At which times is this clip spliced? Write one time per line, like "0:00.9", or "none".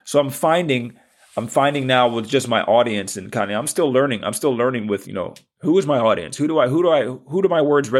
0:05.0